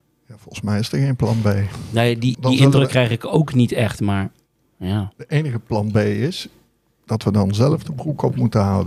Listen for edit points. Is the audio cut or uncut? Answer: cut